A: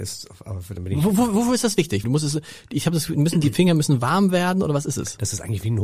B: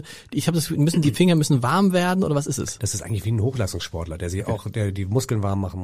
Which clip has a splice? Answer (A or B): A